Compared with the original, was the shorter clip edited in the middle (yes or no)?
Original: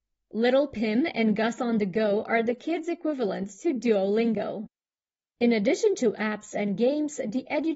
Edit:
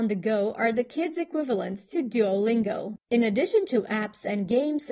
yes